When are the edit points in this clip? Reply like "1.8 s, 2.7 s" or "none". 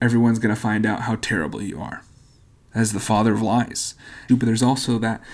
2.6 s, 4.3 s